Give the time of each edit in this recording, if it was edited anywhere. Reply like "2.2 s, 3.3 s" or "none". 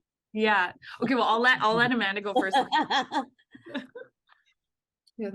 none